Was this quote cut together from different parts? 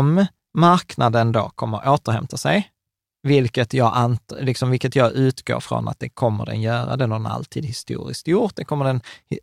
no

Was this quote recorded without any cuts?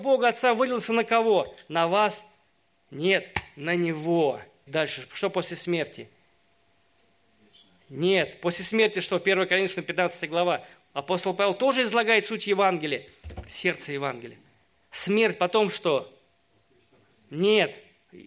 no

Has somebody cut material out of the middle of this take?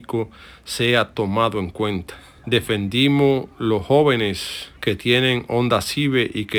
yes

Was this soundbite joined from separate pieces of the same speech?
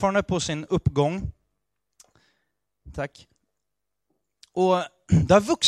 no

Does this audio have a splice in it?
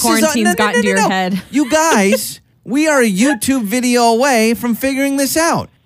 no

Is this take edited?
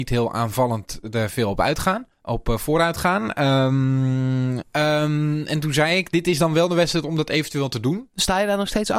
yes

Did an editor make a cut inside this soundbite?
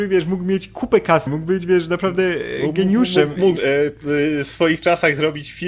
yes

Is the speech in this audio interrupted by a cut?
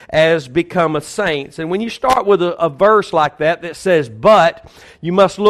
no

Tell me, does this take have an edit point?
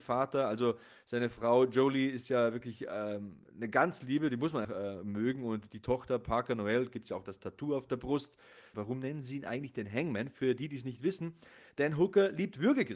yes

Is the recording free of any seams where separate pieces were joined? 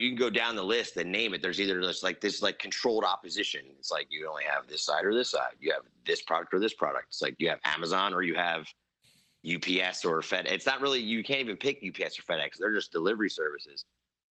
yes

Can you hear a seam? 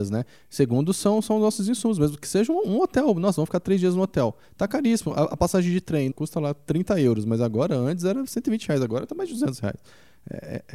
yes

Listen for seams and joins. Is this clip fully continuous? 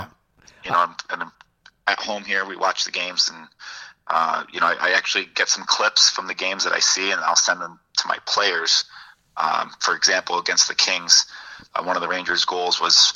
yes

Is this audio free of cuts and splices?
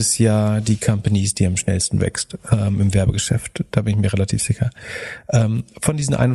yes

